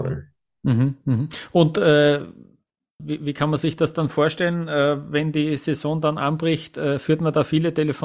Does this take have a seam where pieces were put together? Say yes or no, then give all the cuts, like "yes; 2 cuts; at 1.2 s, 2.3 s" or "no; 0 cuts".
yes; 1 cut; at 3.0 s